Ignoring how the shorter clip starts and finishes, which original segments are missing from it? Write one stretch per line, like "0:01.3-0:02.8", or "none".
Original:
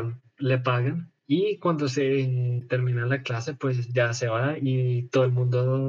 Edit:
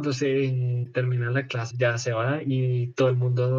0:03.5-0:03.9